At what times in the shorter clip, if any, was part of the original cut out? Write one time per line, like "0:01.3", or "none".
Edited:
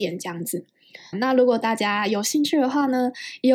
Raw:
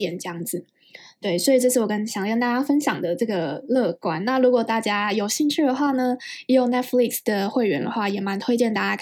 0:01.1